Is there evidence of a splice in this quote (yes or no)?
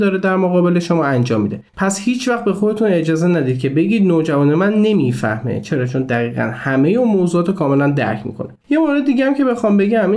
yes